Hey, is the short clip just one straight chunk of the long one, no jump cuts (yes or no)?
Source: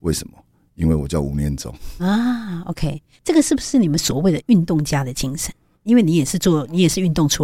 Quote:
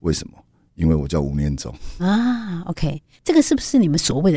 yes